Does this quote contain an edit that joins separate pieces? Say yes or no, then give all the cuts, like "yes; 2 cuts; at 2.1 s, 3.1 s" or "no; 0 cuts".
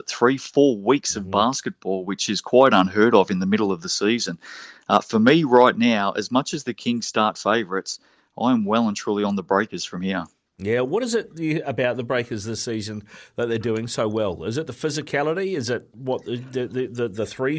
no; 0 cuts